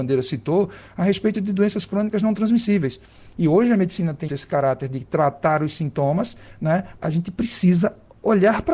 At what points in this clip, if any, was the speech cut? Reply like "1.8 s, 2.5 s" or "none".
4.3 s, 7.0 s

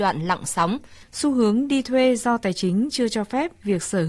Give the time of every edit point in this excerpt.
1.0 s

